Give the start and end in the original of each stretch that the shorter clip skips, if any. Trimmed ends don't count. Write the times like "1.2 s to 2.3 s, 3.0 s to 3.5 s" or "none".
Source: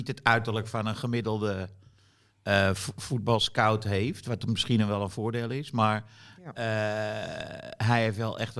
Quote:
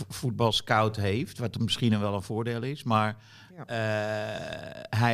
none